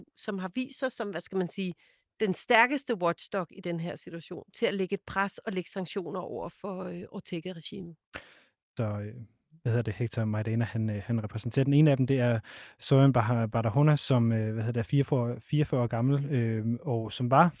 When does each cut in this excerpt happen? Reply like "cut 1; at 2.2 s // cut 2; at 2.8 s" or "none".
cut 1; at 2.1 s // cut 2; at 8.8 s